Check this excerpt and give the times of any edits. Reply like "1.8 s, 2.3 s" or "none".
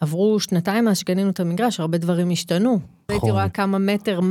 3.1 s